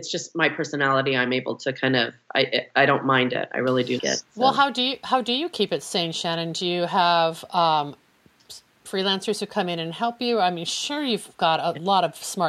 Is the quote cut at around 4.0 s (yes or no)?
yes